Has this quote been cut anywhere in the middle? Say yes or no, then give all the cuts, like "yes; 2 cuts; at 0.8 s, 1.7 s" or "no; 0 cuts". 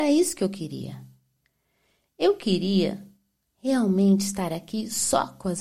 no; 0 cuts